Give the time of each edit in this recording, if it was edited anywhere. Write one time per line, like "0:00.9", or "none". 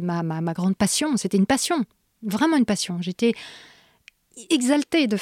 none